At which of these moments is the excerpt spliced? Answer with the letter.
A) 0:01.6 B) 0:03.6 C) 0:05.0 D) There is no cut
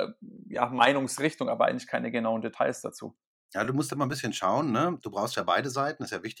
D